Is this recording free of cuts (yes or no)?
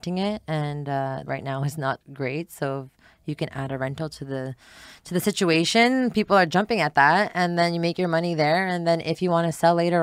no